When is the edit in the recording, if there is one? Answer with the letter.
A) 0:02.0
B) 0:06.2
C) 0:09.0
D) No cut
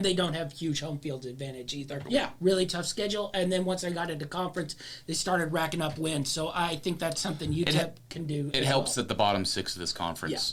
A